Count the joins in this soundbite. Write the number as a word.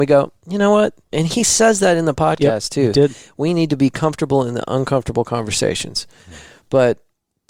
one